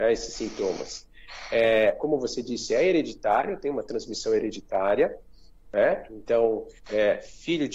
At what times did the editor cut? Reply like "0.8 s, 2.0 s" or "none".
6.8 s